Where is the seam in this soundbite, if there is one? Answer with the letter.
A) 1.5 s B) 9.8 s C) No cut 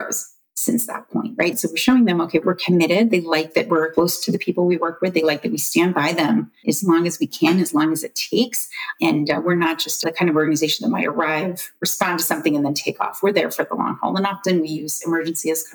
A